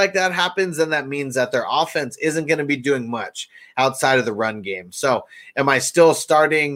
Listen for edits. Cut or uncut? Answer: uncut